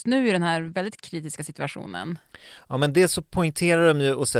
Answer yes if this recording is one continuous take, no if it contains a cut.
yes